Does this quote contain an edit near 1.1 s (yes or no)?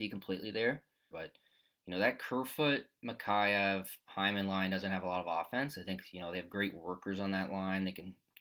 yes